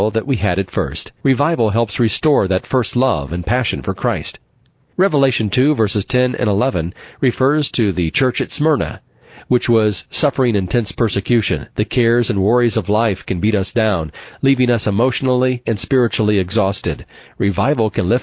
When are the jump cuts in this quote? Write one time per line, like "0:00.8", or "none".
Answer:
0:01.2
0:11.7
0:15.6